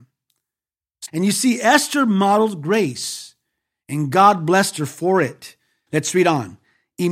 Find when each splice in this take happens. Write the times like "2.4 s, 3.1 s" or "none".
1.1 s, 5.9 s